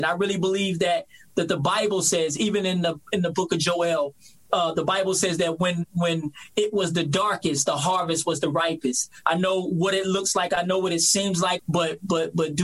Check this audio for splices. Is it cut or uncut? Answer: cut